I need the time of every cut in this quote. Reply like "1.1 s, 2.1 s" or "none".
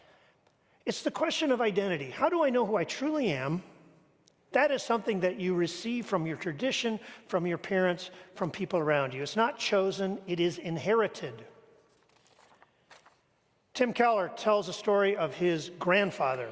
4.5 s

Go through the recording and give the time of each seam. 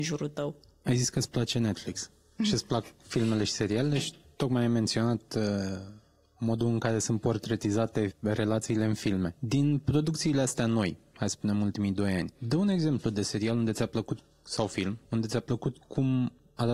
none

